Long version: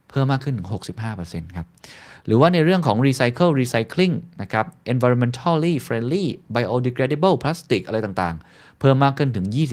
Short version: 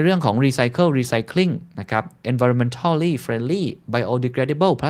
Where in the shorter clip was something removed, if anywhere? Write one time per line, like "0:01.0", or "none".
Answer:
none